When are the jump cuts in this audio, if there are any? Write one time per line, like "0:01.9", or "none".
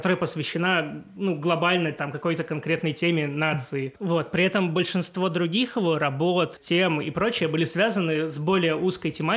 none